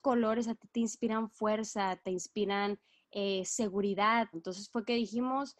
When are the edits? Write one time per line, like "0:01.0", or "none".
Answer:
0:04.3